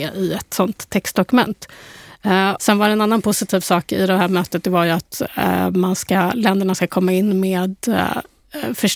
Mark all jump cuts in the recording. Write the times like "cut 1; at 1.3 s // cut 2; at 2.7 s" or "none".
cut 1; at 2.6 s